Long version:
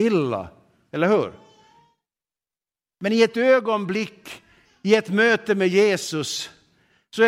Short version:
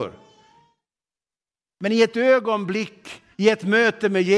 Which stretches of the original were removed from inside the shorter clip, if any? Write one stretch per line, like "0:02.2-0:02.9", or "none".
0:04.5-0:04.8